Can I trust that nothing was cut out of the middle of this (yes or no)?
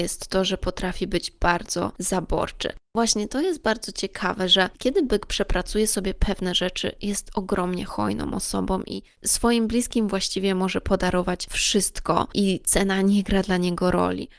yes